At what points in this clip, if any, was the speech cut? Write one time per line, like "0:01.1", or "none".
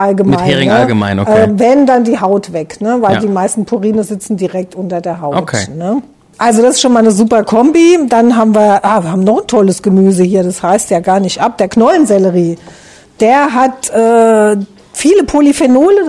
none